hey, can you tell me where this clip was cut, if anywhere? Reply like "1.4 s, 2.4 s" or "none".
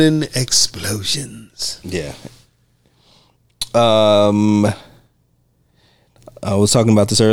none